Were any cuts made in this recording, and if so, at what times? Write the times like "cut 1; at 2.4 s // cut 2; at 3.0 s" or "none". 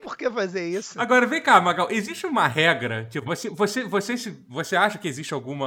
none